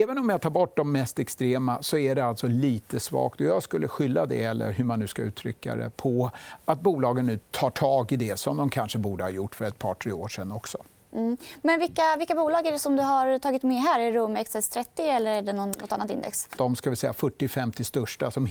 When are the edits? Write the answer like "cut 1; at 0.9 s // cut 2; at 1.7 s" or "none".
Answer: cut 1; at 16.6 s